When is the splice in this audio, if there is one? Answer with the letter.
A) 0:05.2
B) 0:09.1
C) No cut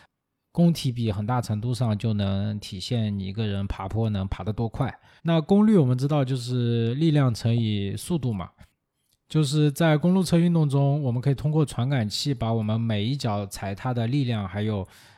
A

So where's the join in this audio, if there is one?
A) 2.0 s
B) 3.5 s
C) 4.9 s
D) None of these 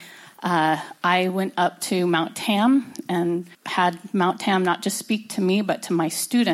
B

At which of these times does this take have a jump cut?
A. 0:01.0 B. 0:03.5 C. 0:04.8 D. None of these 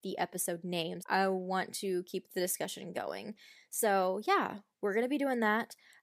A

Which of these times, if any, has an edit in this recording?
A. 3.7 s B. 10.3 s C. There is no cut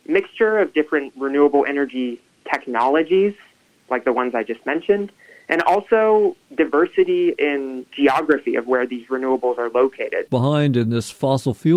B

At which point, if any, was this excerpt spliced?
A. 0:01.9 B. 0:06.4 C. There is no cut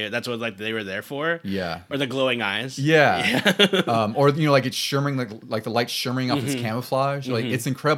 A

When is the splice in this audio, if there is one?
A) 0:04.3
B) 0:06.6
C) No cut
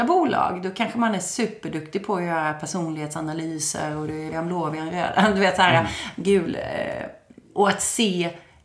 A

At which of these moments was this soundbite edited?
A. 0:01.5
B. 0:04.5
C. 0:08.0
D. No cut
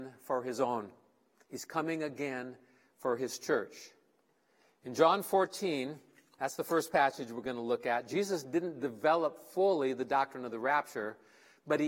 D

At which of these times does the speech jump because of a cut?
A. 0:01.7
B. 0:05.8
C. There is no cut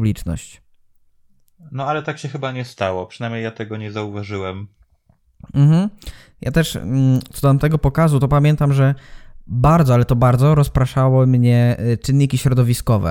C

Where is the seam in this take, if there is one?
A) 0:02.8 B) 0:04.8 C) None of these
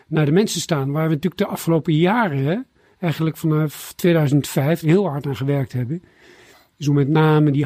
B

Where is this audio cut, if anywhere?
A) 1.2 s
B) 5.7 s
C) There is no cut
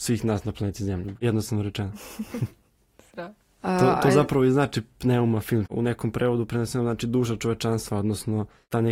B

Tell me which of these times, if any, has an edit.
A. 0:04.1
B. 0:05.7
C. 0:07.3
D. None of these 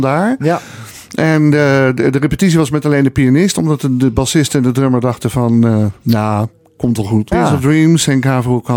C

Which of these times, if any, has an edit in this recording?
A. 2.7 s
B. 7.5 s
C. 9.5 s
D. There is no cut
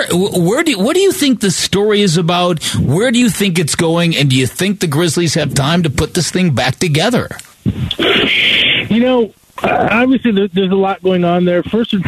B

